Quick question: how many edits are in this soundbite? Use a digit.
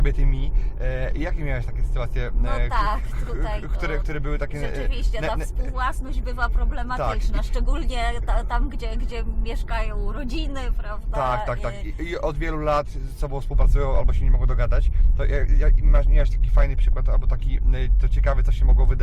0